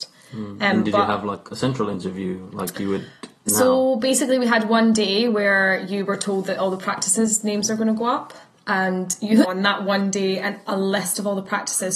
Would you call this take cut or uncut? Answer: cut